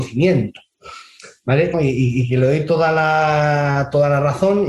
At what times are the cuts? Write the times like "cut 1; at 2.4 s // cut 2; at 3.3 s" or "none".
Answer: cut 1; at 1.7 s